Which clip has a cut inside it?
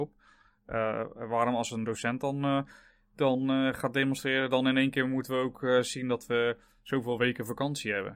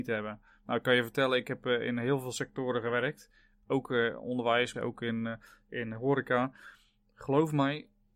second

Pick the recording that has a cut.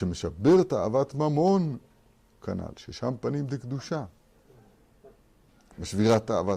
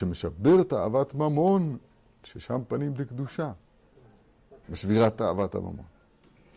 second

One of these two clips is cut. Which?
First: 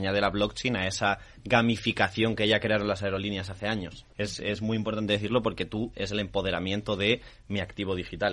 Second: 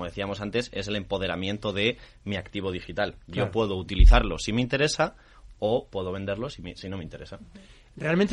first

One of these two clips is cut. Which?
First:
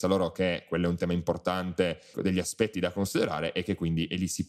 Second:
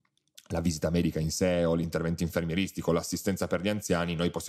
first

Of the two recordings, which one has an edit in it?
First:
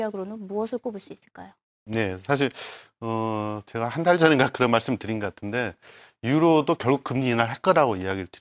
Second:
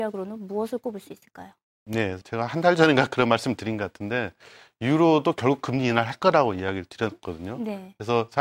second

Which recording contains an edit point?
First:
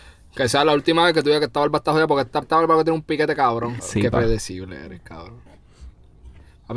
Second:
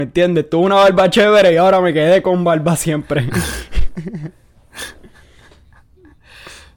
first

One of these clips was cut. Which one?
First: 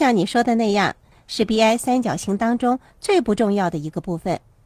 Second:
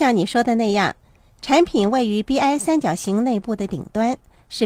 first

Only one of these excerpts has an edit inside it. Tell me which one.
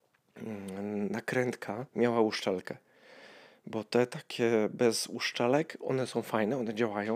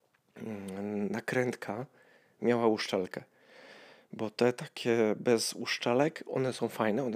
first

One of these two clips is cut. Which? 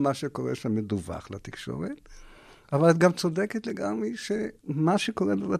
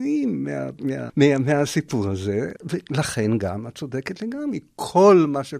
second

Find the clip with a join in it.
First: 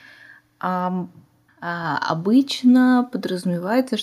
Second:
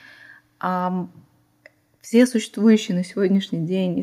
first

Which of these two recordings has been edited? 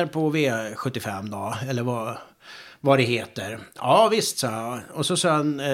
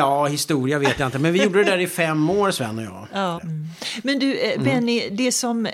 second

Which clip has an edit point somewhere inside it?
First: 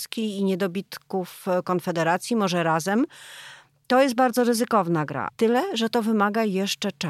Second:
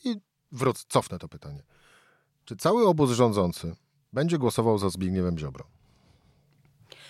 first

